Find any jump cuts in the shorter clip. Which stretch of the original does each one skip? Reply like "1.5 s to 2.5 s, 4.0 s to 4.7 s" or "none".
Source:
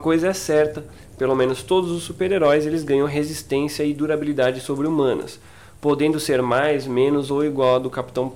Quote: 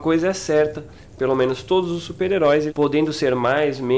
2.7 s to 5.8 s